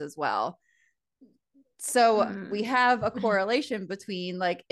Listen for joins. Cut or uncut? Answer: uncut